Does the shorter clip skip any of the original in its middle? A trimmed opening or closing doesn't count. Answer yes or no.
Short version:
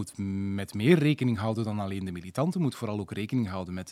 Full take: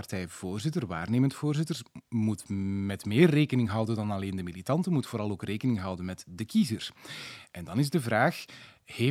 no